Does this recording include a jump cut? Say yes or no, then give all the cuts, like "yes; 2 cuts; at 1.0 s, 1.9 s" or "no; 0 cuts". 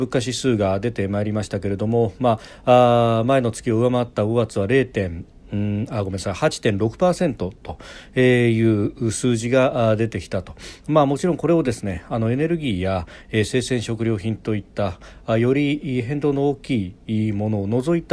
no; 0 cuts